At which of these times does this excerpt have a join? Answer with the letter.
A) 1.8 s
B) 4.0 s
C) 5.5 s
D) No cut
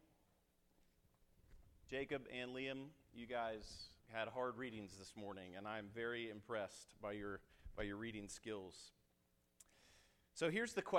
B